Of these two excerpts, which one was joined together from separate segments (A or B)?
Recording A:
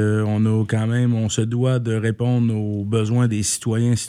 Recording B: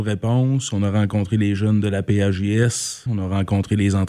B